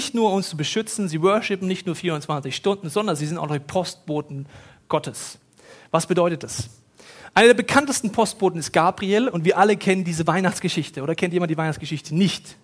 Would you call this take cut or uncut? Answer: uncut